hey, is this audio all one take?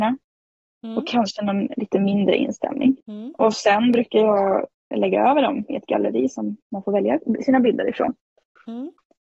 no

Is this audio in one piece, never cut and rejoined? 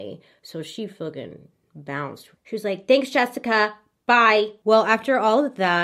yes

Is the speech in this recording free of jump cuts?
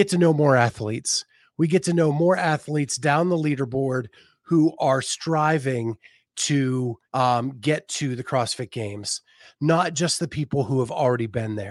no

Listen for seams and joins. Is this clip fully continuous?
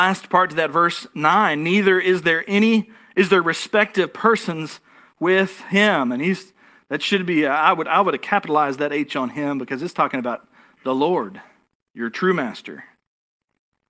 yes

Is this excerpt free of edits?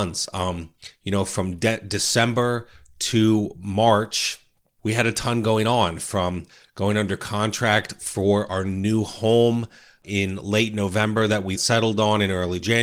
no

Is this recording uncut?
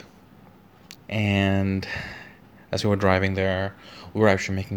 no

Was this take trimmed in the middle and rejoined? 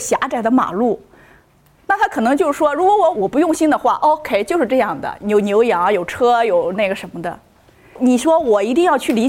yes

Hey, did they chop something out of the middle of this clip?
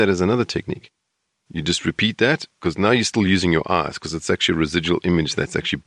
no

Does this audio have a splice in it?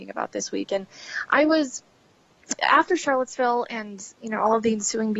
yes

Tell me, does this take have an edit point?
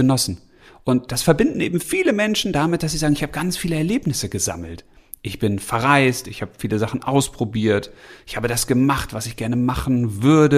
no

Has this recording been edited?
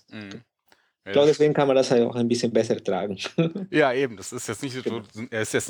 no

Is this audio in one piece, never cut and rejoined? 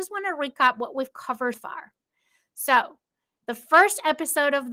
no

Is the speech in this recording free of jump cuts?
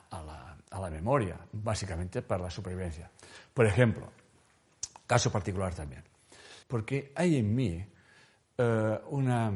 no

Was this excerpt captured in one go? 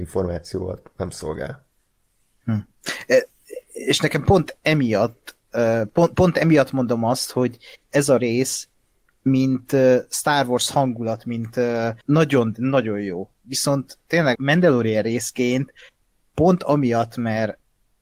no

